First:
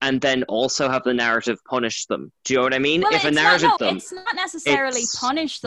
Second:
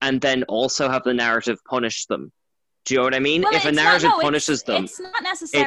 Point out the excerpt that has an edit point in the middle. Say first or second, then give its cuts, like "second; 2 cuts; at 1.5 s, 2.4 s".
first; 2 cuts; at 2.4 s, 3.8 s